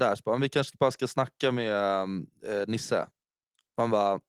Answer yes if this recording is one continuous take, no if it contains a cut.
yes